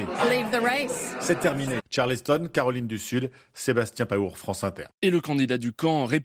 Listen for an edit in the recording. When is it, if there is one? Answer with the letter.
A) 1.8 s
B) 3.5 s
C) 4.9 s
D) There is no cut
A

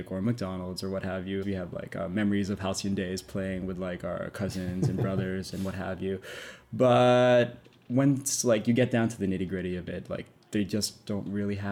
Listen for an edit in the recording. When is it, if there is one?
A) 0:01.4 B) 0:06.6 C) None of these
A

